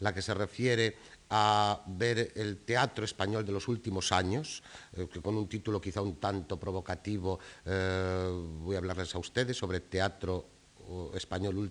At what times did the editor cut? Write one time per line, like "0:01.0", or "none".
none